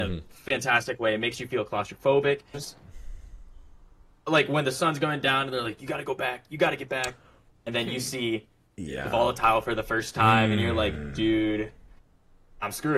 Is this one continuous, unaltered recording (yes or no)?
no